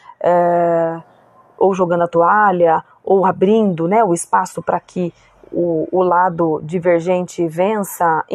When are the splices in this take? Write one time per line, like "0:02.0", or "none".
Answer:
none

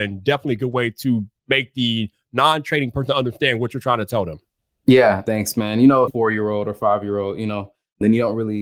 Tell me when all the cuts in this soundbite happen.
0:06.1

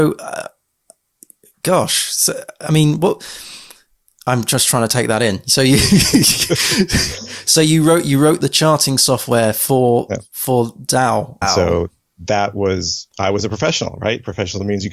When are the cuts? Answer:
0:11.4
0:13.1

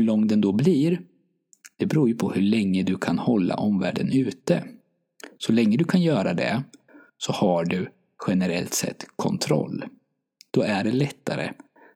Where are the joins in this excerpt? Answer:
none

